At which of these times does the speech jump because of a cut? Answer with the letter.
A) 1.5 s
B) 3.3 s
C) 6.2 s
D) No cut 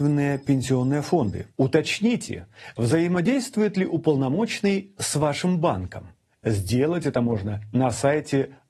D